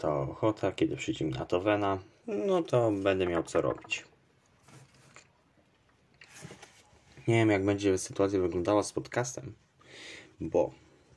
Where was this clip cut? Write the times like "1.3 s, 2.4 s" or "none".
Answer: 2.2 s